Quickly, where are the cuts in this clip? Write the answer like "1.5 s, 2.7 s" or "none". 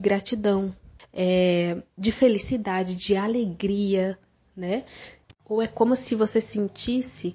1.0 s, 5.2 s